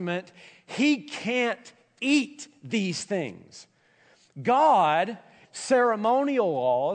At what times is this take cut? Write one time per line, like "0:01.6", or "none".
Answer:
0:05.4